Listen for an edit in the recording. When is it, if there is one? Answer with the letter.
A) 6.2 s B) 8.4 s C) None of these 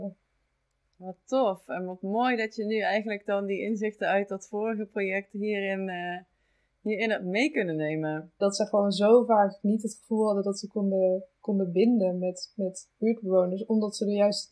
B